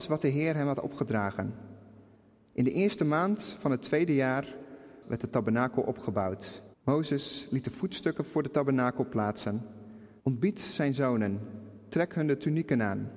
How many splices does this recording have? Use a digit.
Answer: 3